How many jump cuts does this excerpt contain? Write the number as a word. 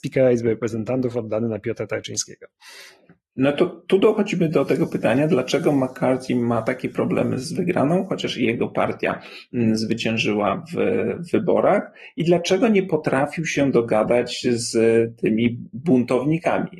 zero